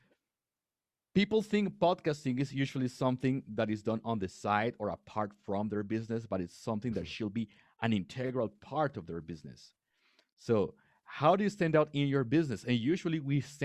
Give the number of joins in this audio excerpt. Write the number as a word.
zero